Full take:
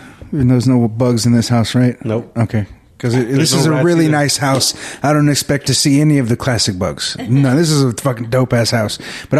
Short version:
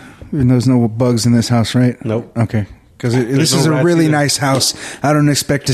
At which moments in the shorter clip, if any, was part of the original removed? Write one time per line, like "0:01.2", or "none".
none